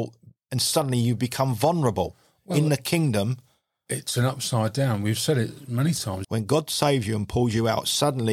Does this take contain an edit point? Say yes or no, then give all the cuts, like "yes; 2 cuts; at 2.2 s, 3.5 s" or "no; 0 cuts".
yes; 1 cut; at 6.2 s